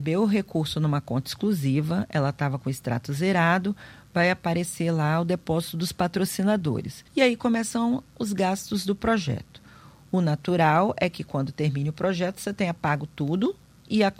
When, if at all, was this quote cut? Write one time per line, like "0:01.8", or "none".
0:07.1